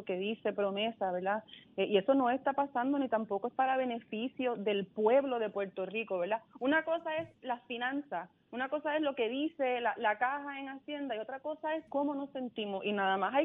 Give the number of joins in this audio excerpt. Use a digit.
0